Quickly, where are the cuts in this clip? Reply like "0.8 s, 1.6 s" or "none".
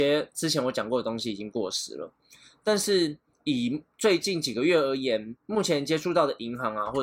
none

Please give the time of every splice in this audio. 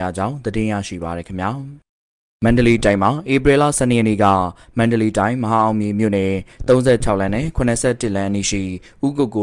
none

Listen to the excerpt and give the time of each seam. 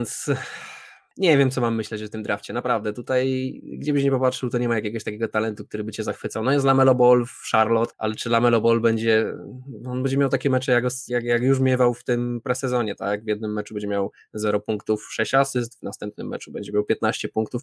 11.1 s

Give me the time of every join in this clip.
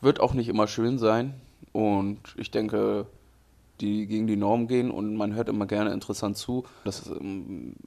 1.7 s, 3.8 s, 6.9 s

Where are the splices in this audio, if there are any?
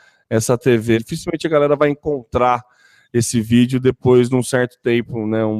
0.9 s

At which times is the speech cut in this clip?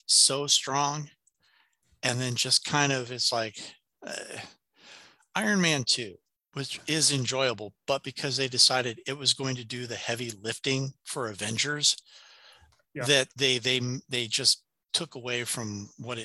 none

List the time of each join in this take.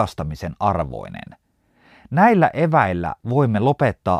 none

